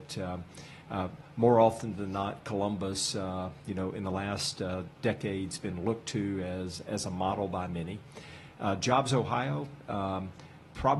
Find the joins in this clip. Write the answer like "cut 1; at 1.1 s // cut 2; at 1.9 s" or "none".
none